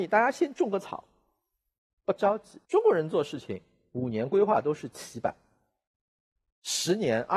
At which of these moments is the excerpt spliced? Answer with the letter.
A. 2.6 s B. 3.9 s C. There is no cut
A